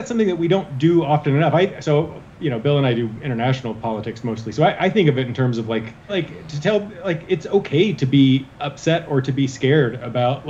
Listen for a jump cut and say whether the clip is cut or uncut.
cut